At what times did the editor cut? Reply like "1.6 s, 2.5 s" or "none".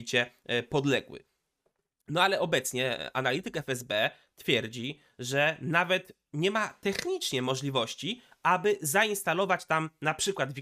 none